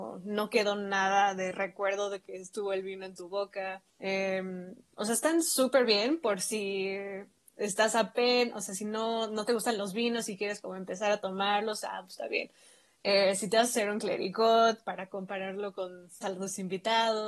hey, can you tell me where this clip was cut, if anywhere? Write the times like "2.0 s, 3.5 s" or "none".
3.9 s, 16.2 s